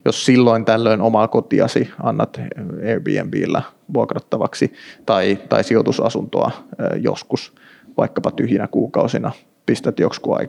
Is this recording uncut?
yes; 0 cuts

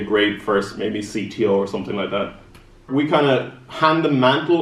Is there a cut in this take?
yes; 1 cut; at 2.9 s

